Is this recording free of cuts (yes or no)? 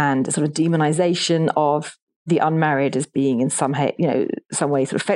yes